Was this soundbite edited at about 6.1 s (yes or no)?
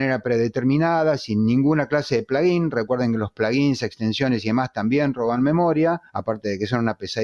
yes